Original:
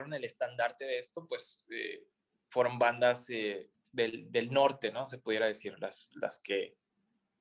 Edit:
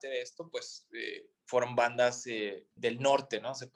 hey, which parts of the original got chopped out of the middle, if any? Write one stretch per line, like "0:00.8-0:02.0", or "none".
0:02.2-0:02.4
0:03.8-0:04.3